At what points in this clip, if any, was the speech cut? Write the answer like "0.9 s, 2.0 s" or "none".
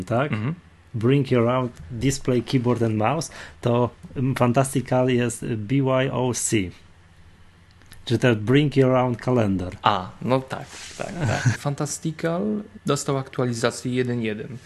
11.5 s, 12.8 s